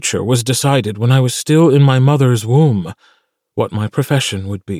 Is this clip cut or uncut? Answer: uncut